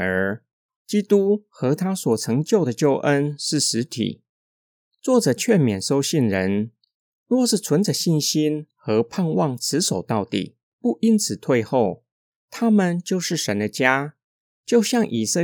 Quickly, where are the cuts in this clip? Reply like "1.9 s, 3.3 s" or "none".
none